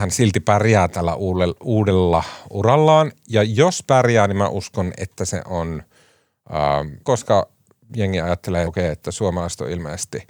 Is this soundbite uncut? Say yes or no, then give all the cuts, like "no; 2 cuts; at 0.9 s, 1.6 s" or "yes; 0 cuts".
no; 2 cuts; at 7.0 s, 8.7 s